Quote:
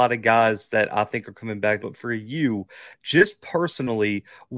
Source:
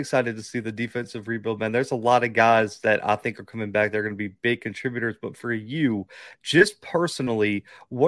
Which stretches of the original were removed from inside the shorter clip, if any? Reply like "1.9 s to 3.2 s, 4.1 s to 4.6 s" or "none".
3.9 s to 5.2 s